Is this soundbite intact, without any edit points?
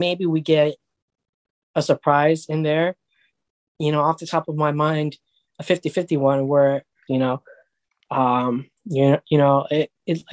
no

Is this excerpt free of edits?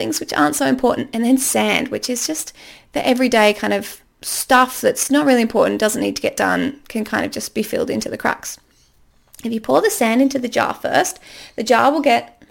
yes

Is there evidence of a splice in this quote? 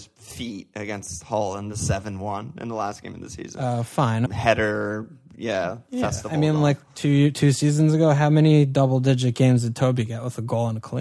yes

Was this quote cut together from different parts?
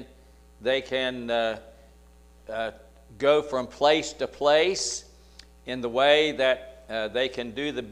no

